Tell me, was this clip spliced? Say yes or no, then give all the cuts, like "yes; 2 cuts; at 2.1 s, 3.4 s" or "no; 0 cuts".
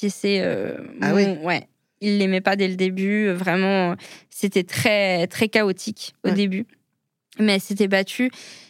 no; 0 cuts